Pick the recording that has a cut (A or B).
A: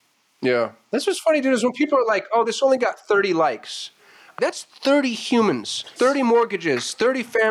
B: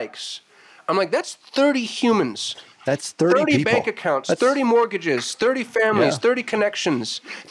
A